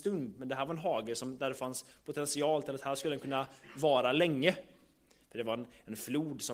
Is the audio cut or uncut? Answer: uncut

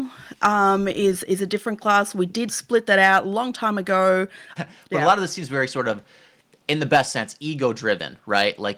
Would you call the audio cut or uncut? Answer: cut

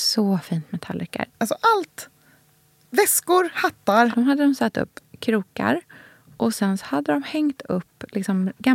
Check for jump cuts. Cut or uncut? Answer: cut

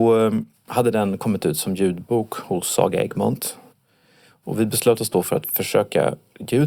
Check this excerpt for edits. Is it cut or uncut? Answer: uncut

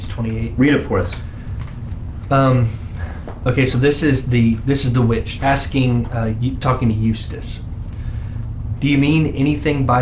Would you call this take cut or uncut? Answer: cut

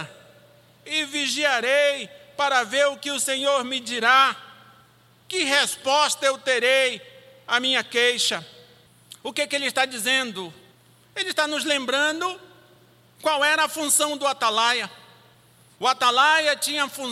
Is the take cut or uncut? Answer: uncut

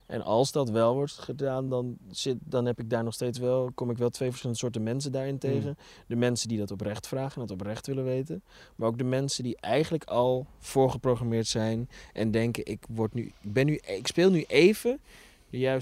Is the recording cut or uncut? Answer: uncut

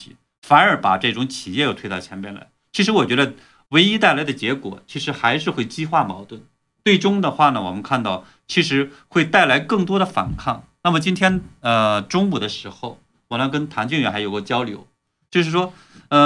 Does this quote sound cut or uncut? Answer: uncut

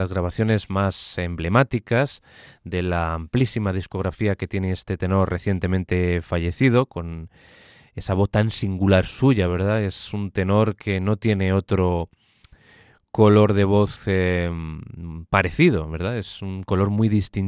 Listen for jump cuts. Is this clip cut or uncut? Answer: uncut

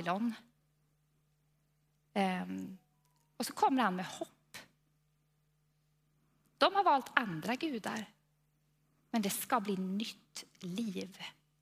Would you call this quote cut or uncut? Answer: uncut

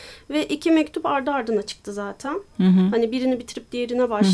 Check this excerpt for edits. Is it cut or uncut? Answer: uncut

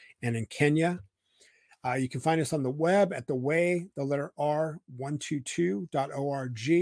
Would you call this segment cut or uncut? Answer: uncut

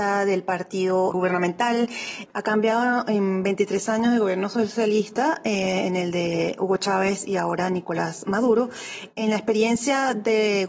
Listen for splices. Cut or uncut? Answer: cut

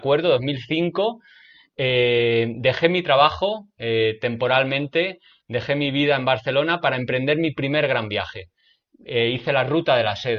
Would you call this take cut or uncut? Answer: uncut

